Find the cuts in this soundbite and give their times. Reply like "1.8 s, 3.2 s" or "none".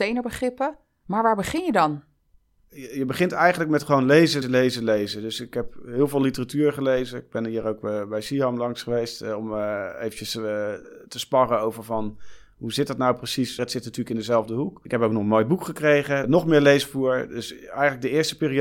4.4 s, 13.6 s, 16.2 s